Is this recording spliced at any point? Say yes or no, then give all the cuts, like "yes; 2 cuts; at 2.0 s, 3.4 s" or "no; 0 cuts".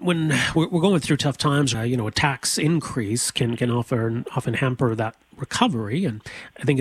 yes; 1 cut; at 1.7 s